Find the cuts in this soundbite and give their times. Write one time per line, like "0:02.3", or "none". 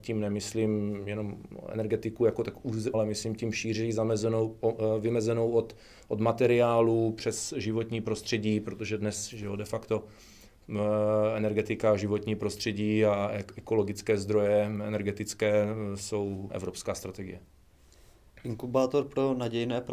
0:02.9
0:16.5